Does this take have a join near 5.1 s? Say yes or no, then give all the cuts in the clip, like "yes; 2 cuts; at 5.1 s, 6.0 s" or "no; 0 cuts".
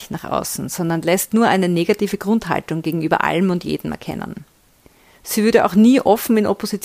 yes; 1 cut; at 5.1 s